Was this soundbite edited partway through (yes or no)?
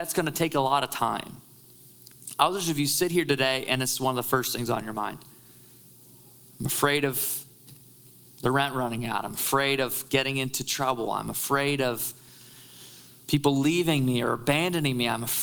no